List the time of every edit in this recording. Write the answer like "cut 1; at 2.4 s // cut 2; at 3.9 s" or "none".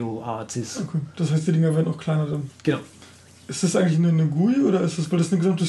none